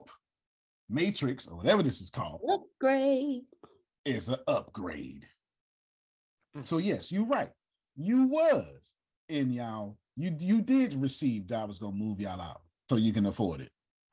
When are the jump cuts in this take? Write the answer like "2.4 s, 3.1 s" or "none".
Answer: 12.9 s